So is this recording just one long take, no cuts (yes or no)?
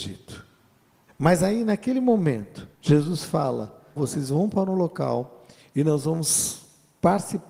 no